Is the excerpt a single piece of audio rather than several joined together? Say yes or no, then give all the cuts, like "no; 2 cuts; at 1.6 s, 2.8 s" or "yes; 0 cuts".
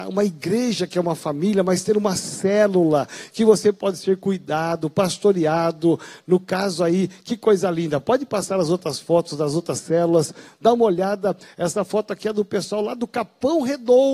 yes; 0 cuts